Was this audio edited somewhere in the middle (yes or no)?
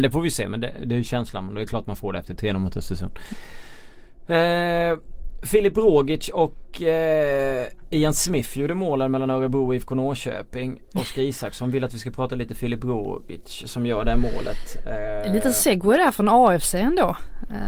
no